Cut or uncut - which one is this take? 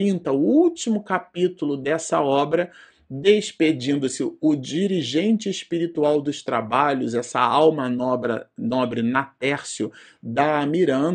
uncut